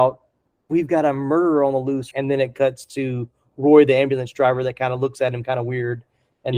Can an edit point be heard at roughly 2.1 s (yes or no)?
yes